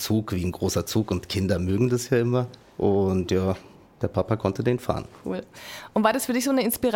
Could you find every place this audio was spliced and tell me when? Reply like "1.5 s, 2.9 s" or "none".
3.8 s